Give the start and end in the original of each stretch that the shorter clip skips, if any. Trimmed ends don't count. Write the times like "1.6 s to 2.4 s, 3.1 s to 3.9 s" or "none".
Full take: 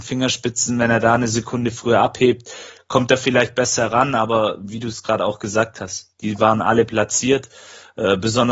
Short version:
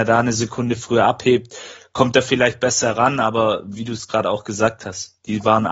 none